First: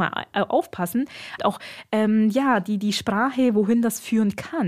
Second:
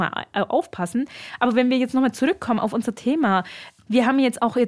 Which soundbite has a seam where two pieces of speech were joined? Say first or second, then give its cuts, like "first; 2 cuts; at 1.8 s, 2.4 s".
first; 1 cut; at 1.4 s